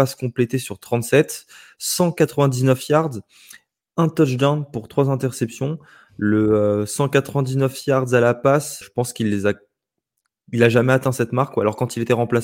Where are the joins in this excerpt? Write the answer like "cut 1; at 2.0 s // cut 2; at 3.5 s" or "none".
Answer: cut 1; at 8.8 s